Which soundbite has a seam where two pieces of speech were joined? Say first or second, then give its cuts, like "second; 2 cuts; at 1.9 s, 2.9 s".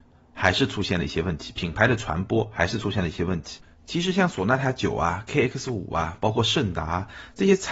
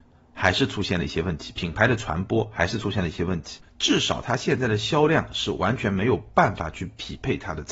second; 1 cut; at 3.7 s